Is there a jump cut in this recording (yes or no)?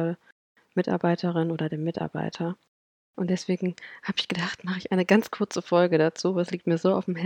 no